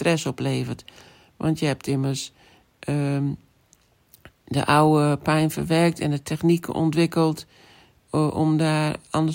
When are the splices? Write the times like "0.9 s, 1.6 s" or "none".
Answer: none